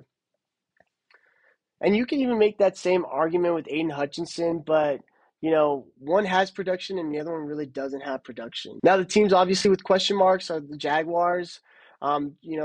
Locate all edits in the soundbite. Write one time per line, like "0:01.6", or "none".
0:08.8